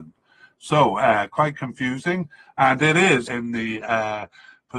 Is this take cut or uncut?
cut